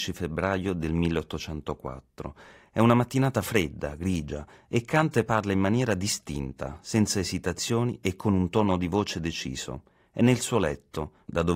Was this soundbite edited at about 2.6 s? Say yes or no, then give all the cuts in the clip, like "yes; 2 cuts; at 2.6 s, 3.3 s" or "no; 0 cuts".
no; 0 cuts